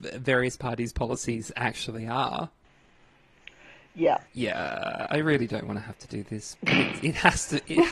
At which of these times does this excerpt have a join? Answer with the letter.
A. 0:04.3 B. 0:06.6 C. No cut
A